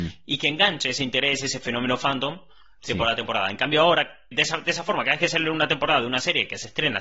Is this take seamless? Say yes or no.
no